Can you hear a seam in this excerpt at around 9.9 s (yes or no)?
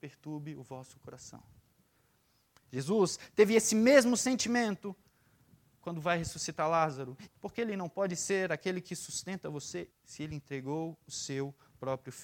yes